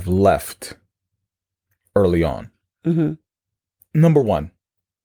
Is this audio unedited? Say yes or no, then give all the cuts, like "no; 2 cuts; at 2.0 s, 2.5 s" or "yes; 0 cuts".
yes; 0 cuts